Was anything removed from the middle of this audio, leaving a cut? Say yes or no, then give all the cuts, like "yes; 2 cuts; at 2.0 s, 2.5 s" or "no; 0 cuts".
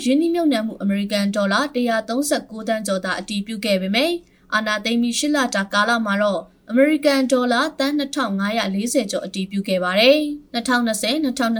yes; 1 cut; at 10.5 s